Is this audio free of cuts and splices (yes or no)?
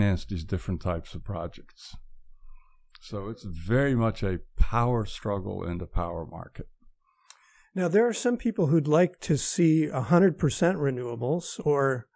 yes